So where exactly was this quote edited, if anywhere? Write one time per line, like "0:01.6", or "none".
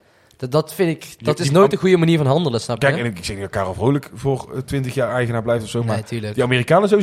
none